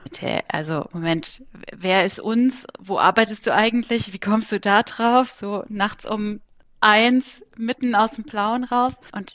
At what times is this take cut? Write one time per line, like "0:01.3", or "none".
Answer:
none